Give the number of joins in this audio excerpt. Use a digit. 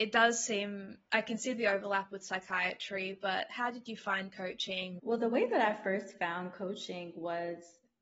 1